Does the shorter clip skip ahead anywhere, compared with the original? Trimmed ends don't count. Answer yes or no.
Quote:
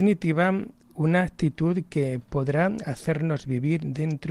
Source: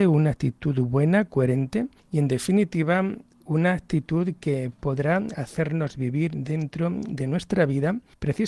no